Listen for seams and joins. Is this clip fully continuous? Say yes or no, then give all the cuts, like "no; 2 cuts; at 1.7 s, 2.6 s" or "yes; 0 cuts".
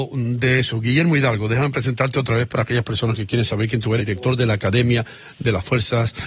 no; 1 cut; at 4.0 s